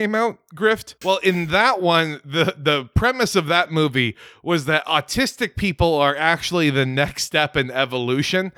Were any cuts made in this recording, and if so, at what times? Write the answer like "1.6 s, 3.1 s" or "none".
1.0 s